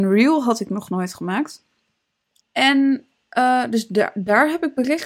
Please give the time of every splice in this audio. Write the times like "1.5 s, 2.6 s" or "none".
2.4 s